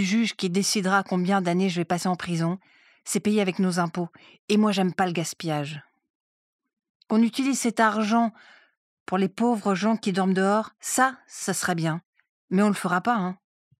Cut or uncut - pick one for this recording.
uncut